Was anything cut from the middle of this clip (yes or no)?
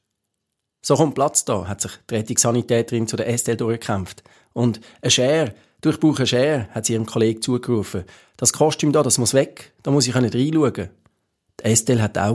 no